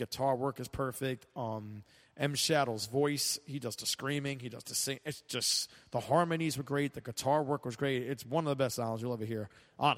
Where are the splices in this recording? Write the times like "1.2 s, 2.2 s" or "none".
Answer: none